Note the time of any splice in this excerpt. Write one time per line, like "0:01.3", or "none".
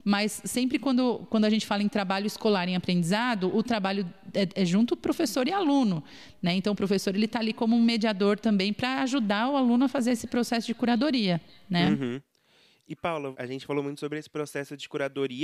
none